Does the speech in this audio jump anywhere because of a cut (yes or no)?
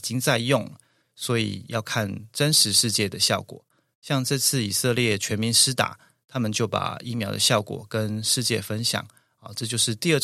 no